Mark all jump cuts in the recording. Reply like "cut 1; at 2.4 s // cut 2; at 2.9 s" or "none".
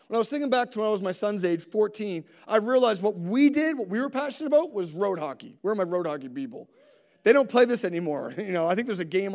none